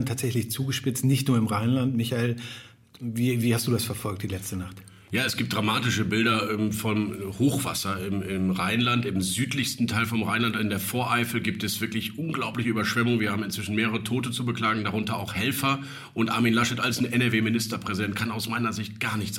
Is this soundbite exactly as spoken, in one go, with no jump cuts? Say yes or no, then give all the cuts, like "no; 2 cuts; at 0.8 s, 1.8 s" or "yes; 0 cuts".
yes; 0 cuts